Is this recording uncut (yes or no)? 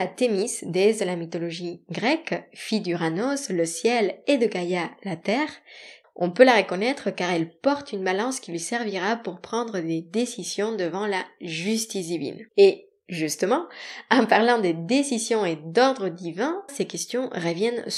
no